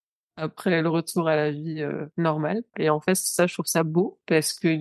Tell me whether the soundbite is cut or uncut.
cut